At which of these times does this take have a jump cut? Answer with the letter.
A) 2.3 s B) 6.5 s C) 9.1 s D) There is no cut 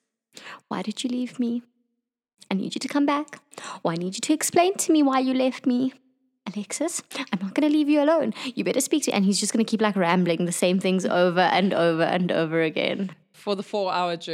D